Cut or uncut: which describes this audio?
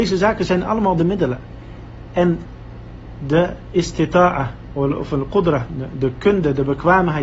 cut